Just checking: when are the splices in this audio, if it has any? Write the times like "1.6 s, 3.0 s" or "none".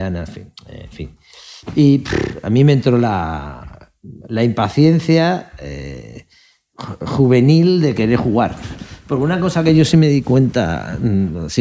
none